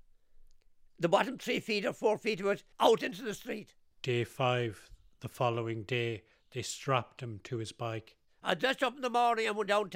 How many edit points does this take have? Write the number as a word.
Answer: one